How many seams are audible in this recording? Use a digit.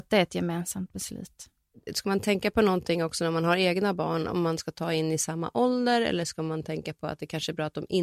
0